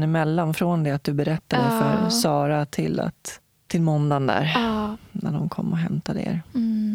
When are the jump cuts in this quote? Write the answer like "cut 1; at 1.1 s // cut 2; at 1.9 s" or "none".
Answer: none